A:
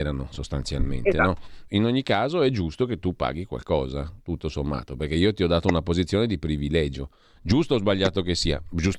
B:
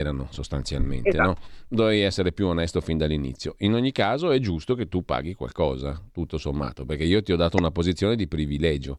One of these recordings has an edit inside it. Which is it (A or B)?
A